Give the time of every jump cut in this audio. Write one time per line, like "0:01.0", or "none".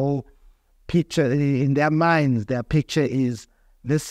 none